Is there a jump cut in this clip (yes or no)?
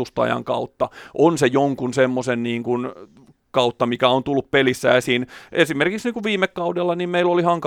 no